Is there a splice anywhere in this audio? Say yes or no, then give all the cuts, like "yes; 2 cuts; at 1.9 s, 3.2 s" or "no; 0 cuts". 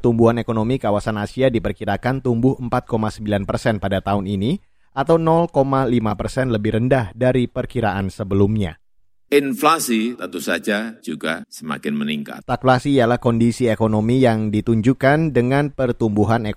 yes; 2 cuts; at 9.3 s, 12.4 s